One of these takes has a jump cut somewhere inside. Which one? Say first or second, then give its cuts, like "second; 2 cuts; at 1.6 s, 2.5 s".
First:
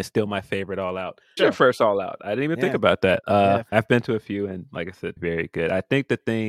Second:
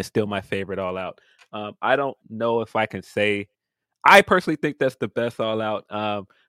first; 3 cuts; at 1.4 s, 3.7 s, 5.2 s